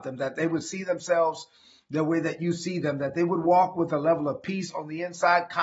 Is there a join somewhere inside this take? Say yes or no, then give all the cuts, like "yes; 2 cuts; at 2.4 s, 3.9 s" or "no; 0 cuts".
no; 0 cuts